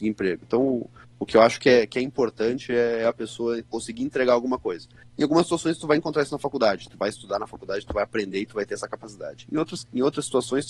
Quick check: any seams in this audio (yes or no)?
no